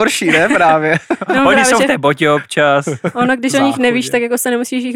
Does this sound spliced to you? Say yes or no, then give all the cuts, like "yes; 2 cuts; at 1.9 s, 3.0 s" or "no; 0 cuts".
no; 0 cuts